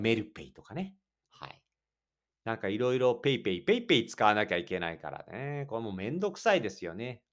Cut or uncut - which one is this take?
uncut